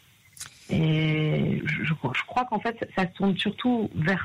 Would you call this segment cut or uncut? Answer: cut